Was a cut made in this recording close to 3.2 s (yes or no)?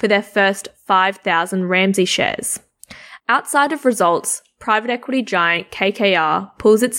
yes